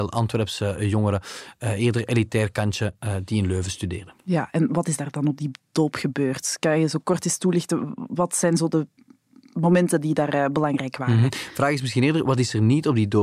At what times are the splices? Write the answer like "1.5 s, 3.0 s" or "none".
none